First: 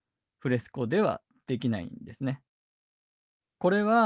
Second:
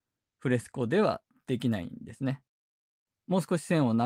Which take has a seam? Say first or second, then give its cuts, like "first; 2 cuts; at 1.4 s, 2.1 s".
second; 1 cut; at 3.1 s